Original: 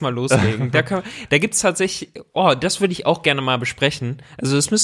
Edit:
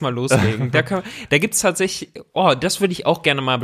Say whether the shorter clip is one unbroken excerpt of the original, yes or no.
yes